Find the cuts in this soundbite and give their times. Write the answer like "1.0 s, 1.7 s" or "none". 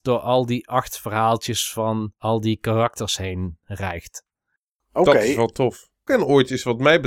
6.1 s